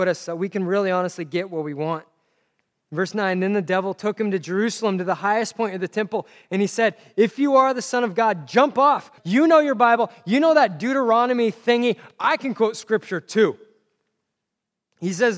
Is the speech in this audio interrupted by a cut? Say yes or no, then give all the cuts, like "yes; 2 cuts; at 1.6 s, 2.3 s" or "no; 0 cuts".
yes; 1 cut; at 9.2 s